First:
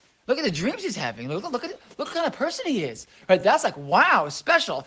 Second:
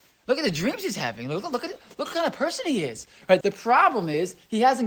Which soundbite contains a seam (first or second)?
second